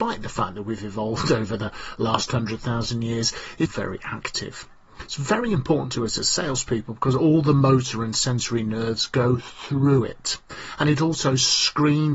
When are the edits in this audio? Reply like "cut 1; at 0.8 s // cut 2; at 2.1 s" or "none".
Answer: cut 1; at 3.7 s